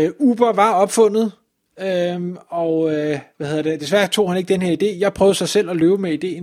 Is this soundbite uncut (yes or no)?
yes